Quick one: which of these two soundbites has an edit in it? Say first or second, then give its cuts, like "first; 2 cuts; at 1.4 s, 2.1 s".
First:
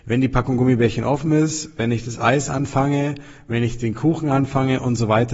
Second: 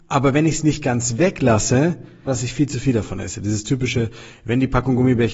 second; 1 cut; at 2.3 s